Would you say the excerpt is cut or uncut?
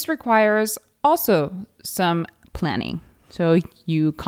uncut